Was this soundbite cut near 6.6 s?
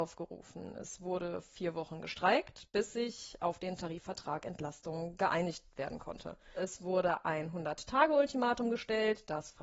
yes; 1 cut; at 6.6 s

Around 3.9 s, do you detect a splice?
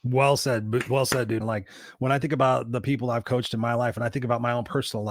no; 1 cut; at 1.4 s

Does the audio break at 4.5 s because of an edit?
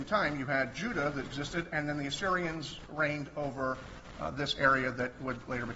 no; 1 cut; at 1.3 s

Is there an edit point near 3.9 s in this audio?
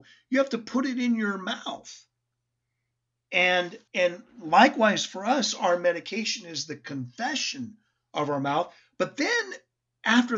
yes; 1 cut; at 3.9 s

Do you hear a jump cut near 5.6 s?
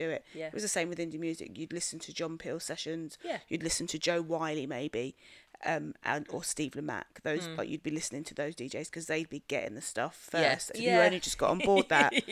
no; 1 cut; at 10.7 s

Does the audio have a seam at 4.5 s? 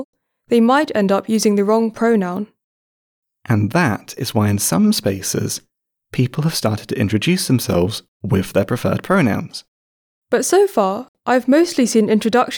no; 1 cut; at 10.1 s

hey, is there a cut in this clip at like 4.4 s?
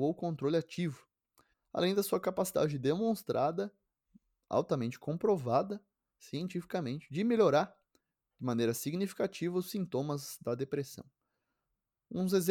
no; 1 cut; at 1.5 s

